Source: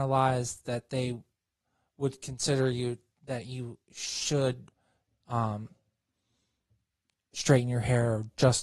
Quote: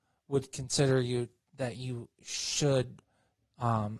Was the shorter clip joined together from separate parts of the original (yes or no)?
no